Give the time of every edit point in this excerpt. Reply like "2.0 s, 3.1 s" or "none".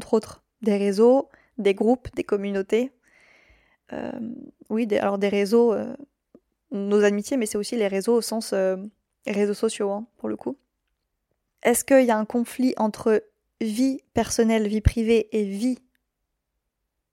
11.5 s